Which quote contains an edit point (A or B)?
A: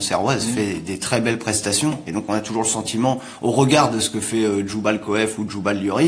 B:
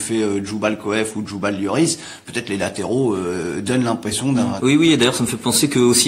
B